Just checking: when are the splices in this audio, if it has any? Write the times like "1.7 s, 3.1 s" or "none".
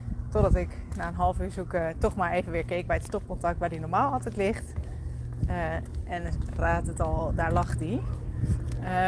none